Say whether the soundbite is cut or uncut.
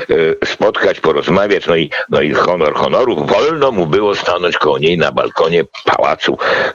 uncut